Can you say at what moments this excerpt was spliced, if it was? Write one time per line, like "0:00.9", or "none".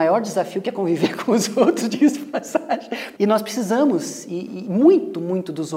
0:03.2